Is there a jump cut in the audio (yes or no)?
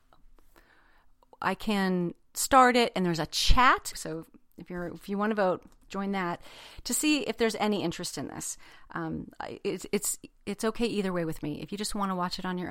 yes